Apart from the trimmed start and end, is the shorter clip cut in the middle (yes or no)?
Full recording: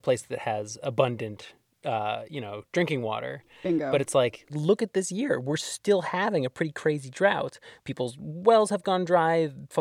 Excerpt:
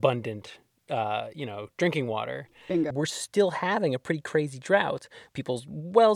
yes